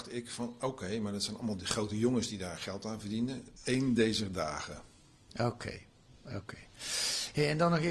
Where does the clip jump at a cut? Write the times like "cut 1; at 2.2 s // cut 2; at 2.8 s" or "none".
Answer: cut 1; at 3.6 s